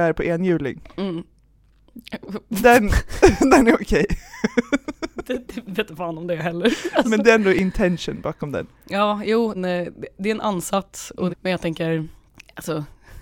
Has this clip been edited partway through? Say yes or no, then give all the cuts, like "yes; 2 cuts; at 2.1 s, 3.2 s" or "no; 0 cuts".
yes; 2 cuts; at 9.5 s, 11.3 s